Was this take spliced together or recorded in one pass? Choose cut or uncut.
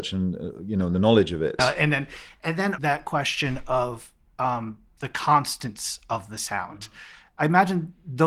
cut